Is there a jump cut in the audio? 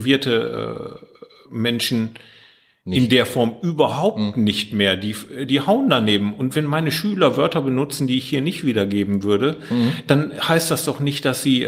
no; 0 cuts

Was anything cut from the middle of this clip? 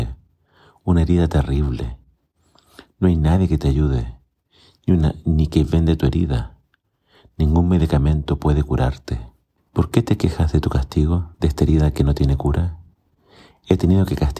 yes; 2 cuts; at 9.6 s, 11.3 s

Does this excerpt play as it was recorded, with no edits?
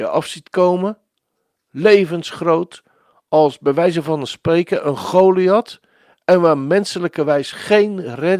yes; 0 cuts

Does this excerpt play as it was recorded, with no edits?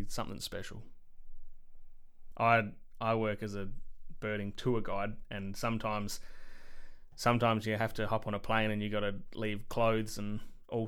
no; 1 cut; at 2.3 s

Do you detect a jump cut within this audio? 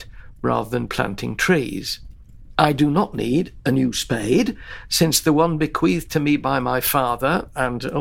yes; 1 cut; at 2.5 s

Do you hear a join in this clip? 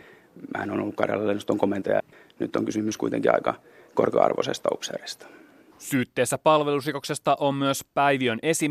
no; 0 cuts

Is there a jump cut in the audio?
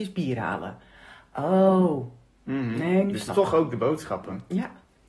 no; 0 cuts

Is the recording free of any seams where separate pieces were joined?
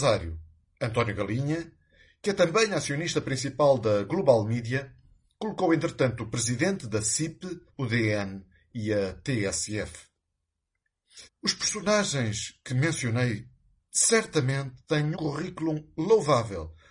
no; 3 cuts; at 7.7 s, 11.3 s, 15.1 s

